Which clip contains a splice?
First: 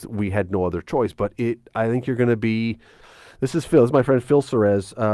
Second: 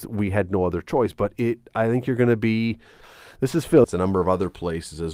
second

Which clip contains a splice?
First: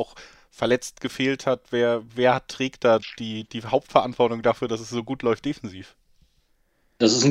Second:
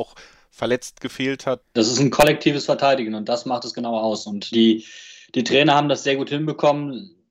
second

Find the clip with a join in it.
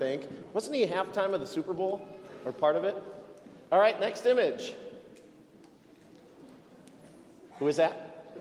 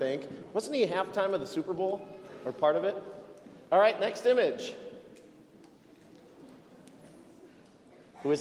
first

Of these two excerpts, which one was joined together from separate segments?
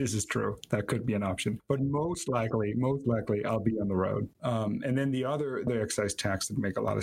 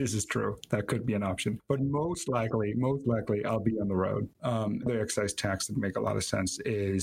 second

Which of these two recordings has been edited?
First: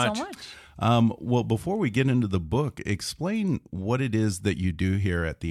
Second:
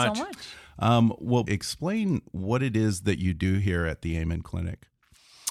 second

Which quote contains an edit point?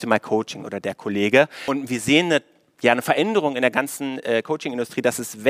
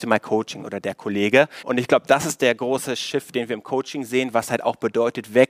second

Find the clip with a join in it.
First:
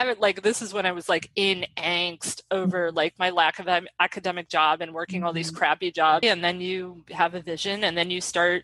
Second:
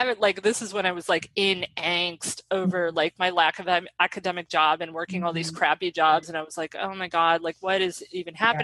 first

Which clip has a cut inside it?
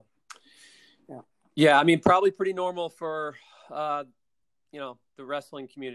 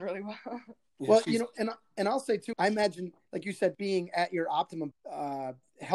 second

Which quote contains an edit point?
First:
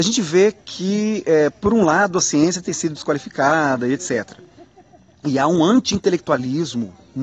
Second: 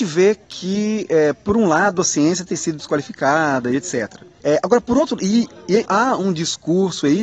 second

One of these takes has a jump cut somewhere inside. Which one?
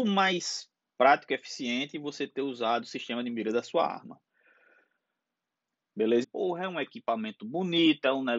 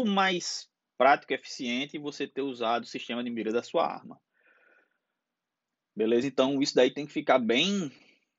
first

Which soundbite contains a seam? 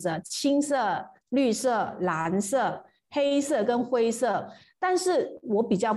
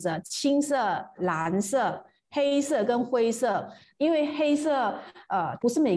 second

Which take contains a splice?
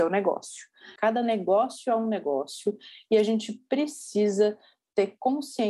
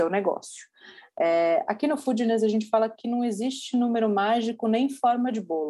first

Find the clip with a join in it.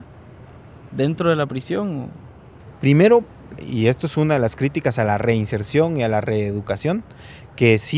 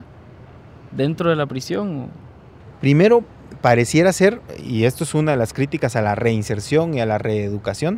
first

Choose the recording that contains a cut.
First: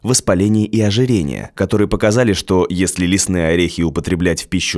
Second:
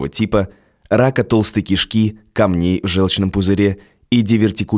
first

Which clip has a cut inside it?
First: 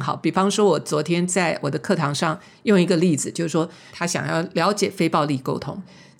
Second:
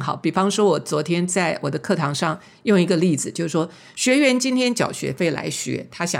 first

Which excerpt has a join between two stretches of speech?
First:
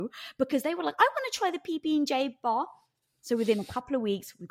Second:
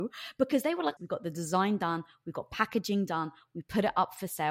second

